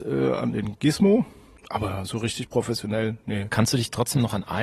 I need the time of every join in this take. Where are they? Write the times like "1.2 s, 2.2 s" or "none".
1.6 s